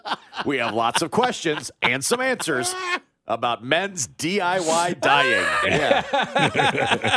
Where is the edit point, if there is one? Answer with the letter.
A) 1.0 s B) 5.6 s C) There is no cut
B